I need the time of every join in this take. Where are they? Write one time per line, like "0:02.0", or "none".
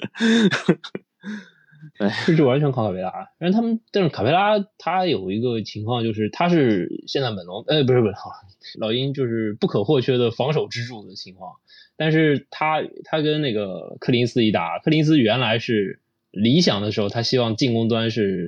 0:08.7